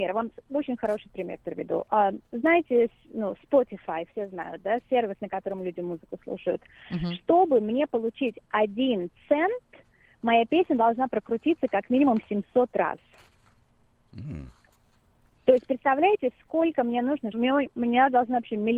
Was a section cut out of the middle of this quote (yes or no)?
yes